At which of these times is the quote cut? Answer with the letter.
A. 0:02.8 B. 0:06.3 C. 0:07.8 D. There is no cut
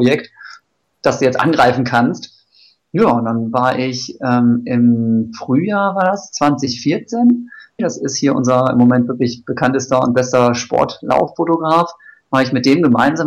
C